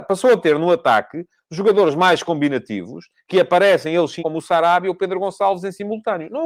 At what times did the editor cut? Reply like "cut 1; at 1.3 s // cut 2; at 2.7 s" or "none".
cut 1; at 4.2 s